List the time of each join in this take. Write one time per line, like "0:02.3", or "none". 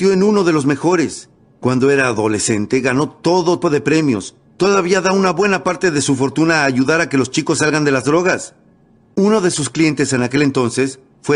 0:03.6

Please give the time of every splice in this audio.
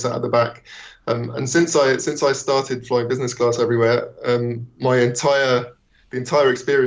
none

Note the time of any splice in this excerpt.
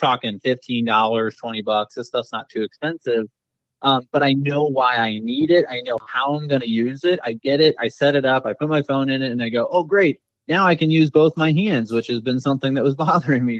none

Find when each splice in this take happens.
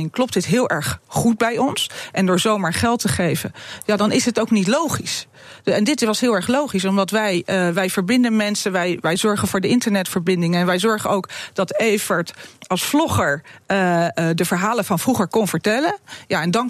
none

